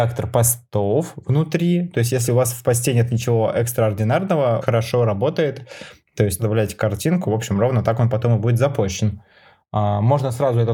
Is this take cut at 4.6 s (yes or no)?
yes